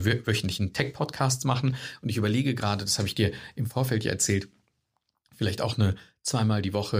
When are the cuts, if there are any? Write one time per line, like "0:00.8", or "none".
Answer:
none